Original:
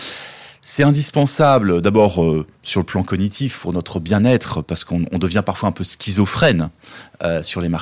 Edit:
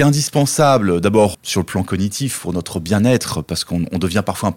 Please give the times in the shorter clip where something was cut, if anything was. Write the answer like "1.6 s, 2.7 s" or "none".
1.3 s